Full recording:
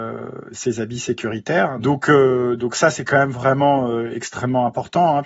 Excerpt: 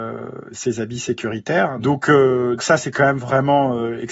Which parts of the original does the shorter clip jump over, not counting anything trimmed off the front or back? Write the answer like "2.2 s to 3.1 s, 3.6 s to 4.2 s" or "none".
2.6 s to 2.7 s